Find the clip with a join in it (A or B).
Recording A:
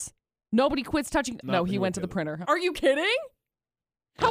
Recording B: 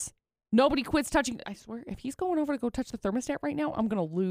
A